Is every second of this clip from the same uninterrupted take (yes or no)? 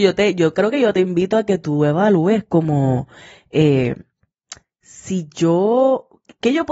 yes